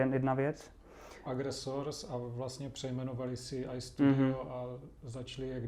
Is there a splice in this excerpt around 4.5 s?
no; 1 cut; at 1.3 s

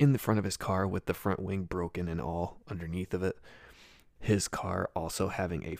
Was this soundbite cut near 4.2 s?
yes; 1 cut; at 4.2 s

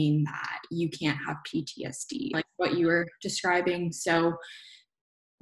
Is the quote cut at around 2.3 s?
yes; 1 cut; at 2.3 s

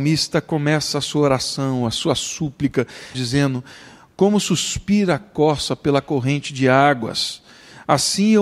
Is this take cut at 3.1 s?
yes; 1 cut; at 3.1 s

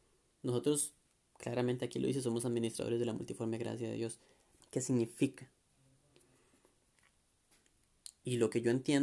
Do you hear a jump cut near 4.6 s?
yes; 1 cut; at 4.6 s

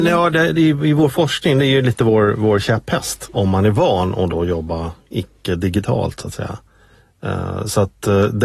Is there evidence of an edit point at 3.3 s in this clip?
yes; 1 cut; at 3.3 s

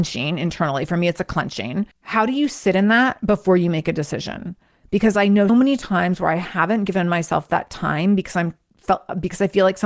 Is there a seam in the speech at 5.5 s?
yes; 2 cuts; at 1.9 s, 5.5 s

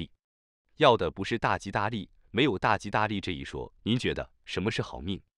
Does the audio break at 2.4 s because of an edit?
no; 1 cut; at 3.8 s

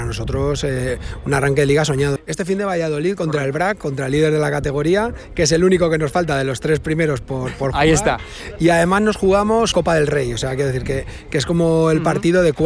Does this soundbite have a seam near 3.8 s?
no; 2 cuts; at 2.2 s, 9.7 s

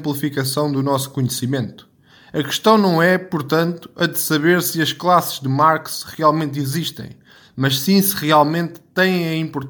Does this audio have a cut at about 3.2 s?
no; 0 cuts

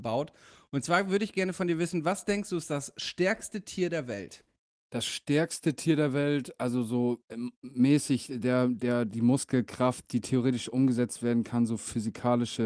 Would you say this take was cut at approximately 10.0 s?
no; 0 cuts

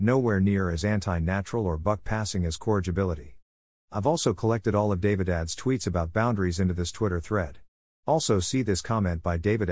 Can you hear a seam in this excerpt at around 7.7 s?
no; 1 cut; at 3.7 s

